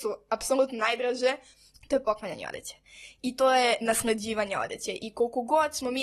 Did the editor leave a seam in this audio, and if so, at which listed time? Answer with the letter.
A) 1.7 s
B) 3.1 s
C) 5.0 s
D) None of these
A